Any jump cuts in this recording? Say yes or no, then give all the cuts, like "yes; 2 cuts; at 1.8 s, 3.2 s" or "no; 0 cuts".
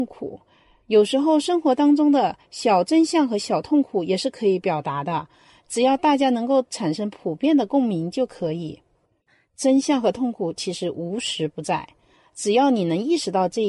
no; 0 cuts